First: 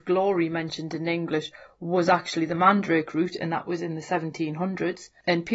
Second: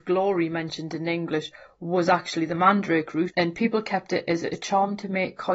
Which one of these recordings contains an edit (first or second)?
second